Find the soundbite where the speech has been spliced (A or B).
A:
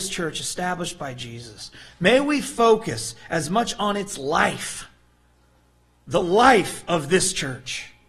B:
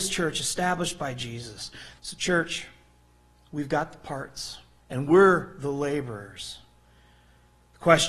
B